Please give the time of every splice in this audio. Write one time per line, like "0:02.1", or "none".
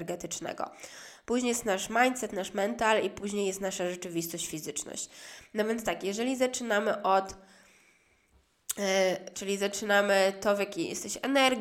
0:09.3